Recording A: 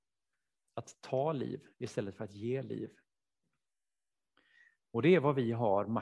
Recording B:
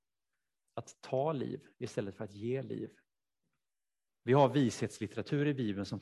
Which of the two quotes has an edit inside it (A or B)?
B